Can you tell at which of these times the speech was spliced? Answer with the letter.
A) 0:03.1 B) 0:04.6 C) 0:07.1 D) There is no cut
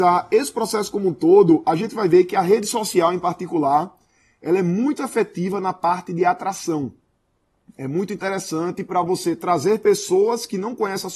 D